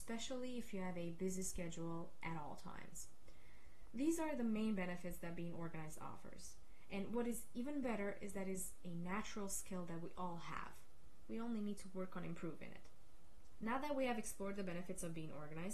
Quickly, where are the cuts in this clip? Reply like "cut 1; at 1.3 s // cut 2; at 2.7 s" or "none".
none